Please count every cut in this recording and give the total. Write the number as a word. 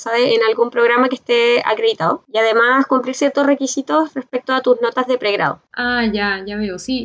one